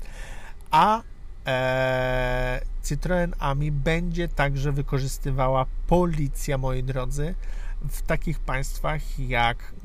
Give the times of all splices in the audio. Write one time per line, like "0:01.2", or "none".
none